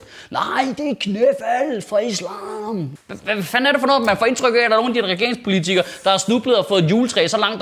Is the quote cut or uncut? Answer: cut